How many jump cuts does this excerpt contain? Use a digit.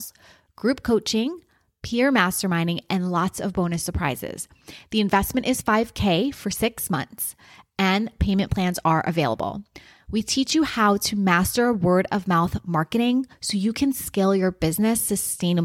0